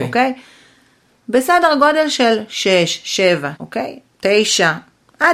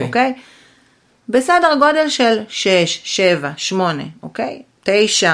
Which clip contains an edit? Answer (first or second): first